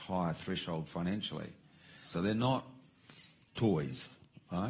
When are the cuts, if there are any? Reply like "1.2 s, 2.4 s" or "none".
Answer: 2.0 s